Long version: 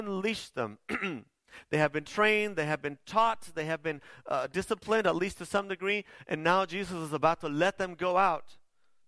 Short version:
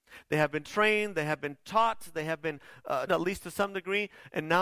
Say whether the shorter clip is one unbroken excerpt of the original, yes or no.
no